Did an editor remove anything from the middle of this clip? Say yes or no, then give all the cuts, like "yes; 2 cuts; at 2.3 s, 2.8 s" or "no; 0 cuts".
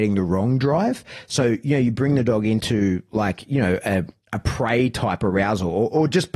no; 0 cuts